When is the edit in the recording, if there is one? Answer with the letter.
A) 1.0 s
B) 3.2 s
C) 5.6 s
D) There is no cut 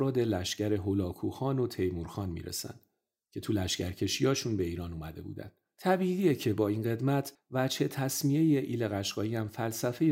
C